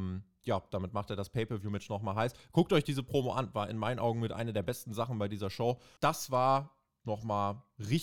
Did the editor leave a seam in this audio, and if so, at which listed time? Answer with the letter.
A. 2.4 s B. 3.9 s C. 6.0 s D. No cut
C